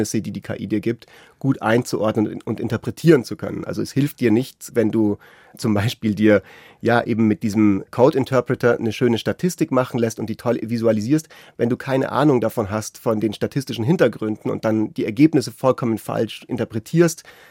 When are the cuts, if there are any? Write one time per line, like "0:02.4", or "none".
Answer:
none

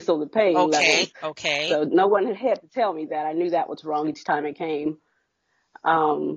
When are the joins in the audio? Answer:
none

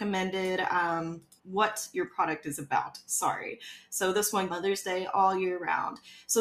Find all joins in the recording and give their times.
0:01.4
0:04.5

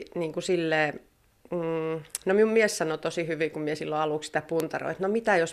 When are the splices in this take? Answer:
none

